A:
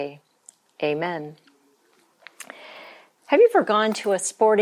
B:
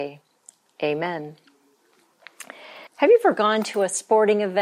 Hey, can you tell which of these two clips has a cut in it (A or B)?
B